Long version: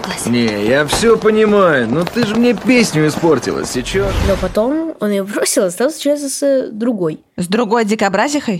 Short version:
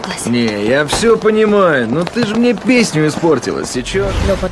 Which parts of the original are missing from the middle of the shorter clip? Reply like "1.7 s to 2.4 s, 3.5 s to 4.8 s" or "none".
none